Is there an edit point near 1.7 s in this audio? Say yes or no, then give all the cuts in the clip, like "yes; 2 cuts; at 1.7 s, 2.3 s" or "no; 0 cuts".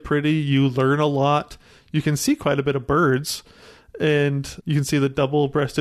no; 0 cuts